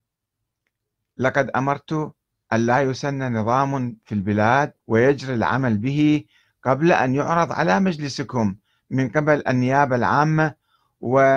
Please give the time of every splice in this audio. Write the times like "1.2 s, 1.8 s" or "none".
4.8 s